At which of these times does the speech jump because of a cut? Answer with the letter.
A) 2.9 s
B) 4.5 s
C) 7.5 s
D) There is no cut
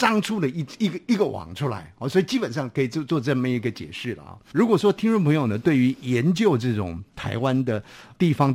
B